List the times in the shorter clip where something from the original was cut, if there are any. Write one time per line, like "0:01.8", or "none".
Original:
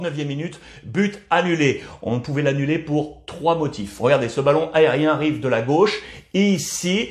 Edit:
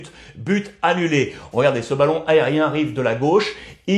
0:01.5